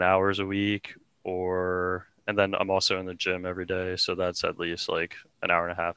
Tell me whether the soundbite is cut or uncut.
uncut